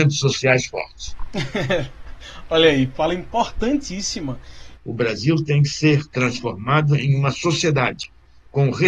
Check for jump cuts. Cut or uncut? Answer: cut